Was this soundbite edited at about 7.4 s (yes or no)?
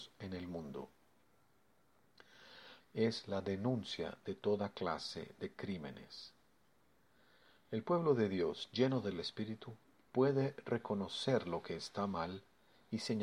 no